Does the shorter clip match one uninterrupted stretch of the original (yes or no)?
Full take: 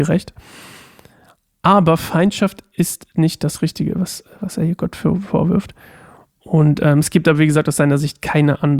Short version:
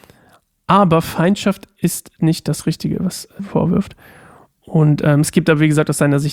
no